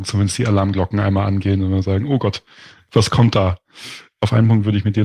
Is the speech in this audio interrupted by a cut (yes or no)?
no